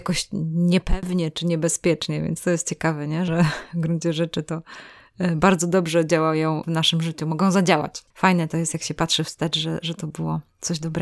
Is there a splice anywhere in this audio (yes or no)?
yes